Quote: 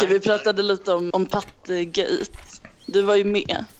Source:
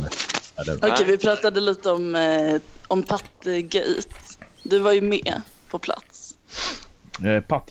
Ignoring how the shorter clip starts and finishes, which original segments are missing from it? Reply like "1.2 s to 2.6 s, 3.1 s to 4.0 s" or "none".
2.1 s to 2.9 s